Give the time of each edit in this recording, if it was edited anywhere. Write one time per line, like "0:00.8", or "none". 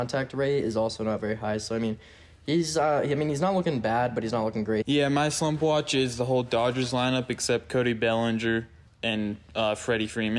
0:04.8
0:08.9